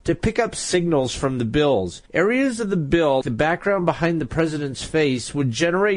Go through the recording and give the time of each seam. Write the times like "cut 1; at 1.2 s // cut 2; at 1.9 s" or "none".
cut 1; at 2.1 s // cut 2; at 3.2 s